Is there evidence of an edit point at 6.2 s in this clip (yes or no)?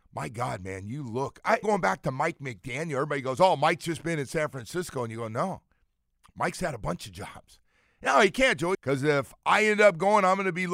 no